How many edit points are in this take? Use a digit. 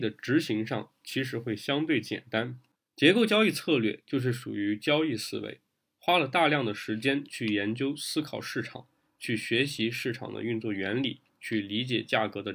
1